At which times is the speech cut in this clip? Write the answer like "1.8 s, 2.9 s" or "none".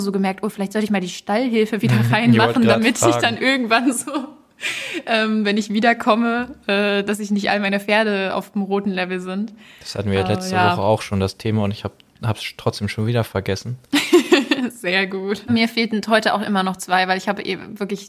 15.5 s